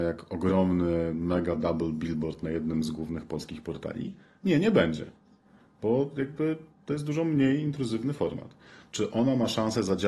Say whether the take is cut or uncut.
uncut